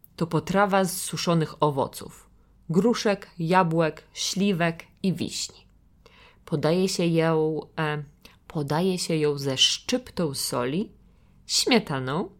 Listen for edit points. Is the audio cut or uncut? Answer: uncut